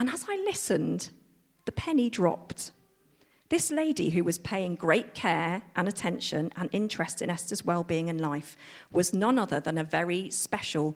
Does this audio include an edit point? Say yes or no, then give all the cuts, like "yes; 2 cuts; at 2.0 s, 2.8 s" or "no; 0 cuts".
no; 0 cuts